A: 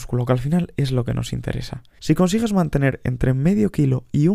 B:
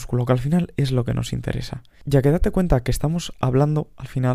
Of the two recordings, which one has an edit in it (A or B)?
A